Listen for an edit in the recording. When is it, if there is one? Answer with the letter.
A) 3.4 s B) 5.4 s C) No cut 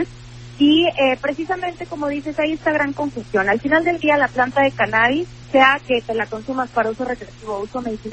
B